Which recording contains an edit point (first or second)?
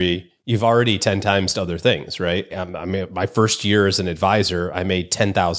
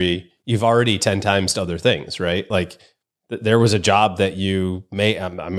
first